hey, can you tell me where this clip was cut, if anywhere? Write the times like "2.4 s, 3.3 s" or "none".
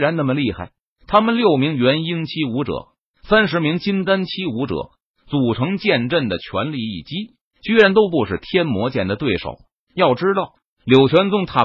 none